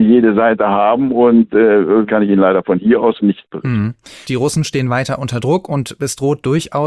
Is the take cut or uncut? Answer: cut